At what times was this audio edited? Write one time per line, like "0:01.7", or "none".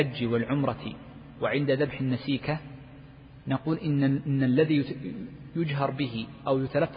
none